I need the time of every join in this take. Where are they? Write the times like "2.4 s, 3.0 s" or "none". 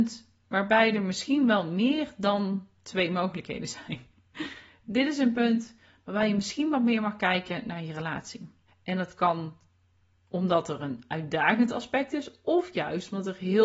8.7 s